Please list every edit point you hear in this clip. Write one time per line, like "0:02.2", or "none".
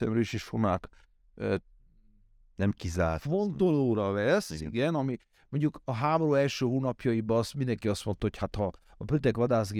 none